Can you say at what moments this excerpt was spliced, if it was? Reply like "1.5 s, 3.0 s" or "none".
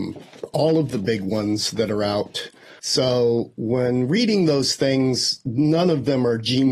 2.8 s